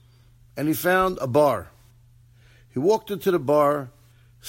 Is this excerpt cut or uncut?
uncut